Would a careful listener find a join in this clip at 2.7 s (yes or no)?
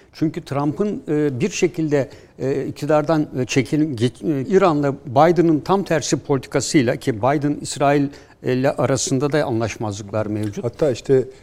no